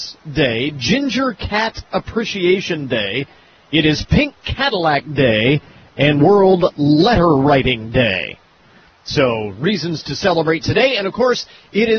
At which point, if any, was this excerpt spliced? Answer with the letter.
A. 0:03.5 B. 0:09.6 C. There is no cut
C